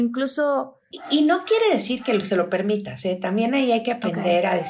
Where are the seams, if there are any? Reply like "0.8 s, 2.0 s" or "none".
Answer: 0.9 s